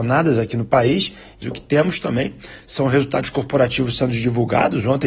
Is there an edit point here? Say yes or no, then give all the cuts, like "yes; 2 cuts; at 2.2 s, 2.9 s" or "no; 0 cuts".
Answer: yes; 1 cut; at 1.4 s